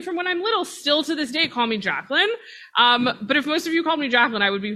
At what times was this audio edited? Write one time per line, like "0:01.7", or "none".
none